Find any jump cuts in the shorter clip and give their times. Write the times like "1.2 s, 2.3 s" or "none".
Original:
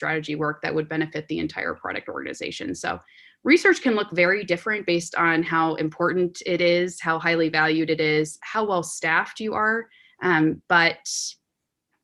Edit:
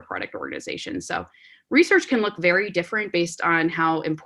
none